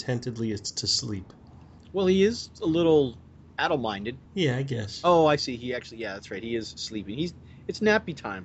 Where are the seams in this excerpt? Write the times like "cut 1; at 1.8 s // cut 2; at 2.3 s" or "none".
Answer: cut 1; at 4.2 s